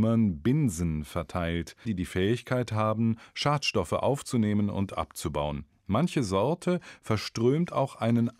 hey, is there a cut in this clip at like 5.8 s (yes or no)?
no